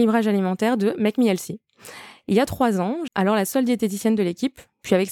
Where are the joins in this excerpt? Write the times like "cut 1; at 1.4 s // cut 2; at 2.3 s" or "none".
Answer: cut 1; at 3.1 s